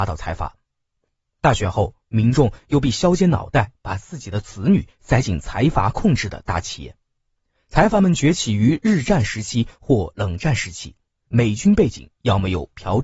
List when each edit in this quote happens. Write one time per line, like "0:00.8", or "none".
0:11.3